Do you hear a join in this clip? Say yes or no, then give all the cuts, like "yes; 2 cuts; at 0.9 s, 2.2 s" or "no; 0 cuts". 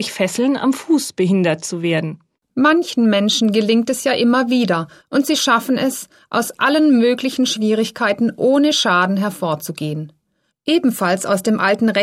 yes; 3 cuts; at 2.3 s, 5.0 s, 10.5 s